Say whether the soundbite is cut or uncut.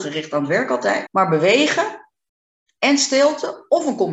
cut